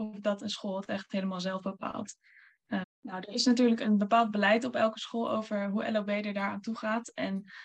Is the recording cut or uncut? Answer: cut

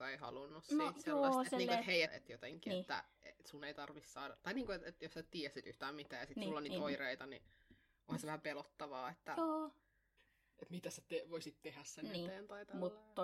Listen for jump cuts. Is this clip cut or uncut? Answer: cut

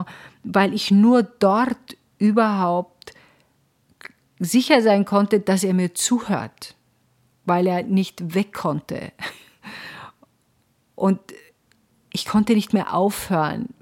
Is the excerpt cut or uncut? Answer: uncut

